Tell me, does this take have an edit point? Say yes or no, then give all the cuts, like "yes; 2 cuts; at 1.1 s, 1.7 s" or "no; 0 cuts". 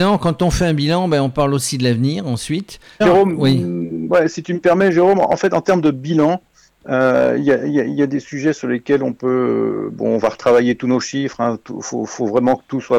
yes; 1 cut; at 3.0 s